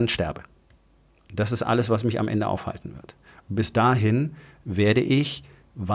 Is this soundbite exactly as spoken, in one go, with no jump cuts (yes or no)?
yes